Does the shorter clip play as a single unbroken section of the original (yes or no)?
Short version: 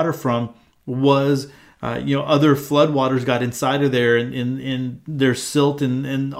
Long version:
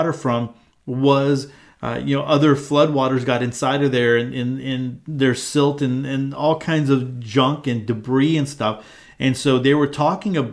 yes